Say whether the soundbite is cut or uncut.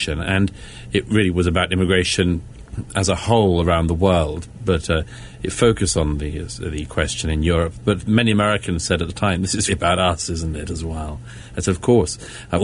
cut